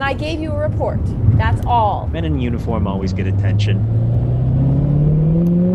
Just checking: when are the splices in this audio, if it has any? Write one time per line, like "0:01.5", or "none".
0:02.1